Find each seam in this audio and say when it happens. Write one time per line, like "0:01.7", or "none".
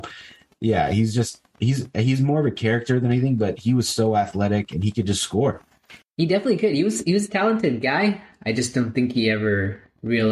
0:06.0